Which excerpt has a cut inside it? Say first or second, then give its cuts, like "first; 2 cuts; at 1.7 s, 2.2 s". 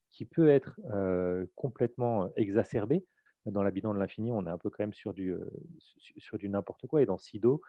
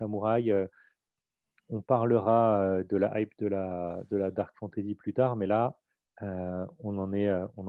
first; 1 cut; at 3.3 s